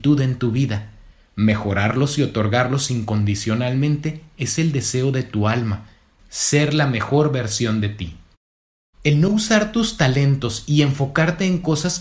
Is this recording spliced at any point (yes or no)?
yes